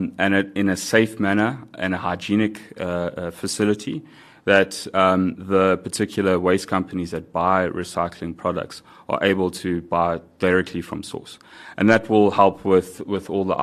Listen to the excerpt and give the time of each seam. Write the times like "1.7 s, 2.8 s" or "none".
none